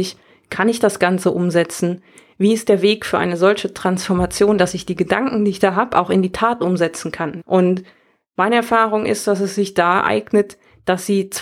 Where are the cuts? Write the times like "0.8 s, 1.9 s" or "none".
7.4 s